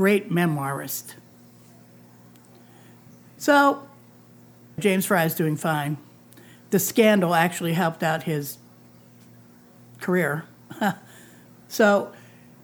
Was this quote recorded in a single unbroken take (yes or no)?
no